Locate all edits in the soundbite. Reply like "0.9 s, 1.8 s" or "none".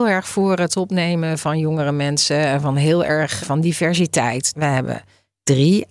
3.4 s, 4.5 s